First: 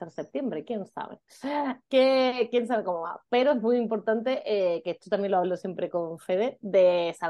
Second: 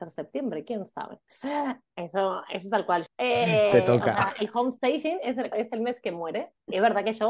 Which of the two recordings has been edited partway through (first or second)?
second